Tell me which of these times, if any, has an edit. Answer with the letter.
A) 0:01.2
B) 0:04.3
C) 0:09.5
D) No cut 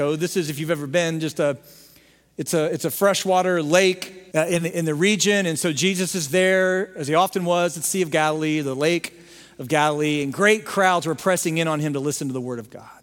B